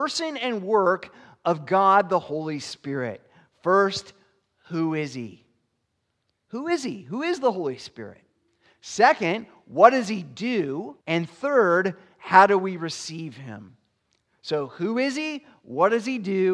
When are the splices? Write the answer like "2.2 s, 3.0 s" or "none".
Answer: 11.0 s